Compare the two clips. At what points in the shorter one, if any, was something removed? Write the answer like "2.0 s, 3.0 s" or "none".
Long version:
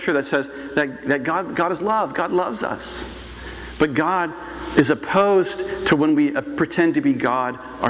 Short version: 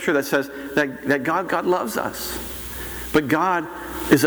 1.5 s